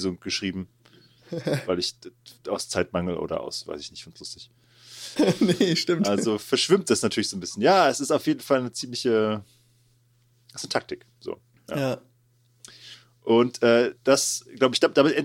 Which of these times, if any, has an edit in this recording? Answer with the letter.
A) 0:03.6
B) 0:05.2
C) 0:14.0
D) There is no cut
B